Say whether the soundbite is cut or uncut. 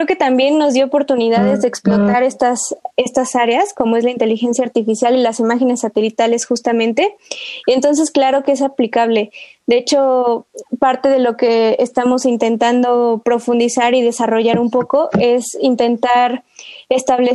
uncut